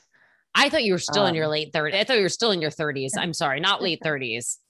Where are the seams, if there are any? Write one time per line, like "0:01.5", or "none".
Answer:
0:01.9

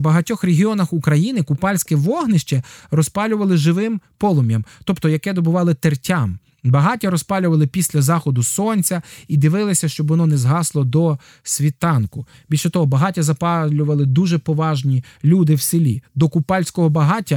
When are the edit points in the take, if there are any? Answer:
none

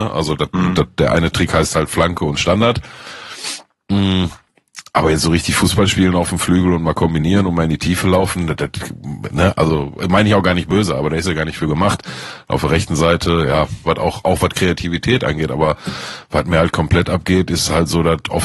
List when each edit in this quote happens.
0:13.9

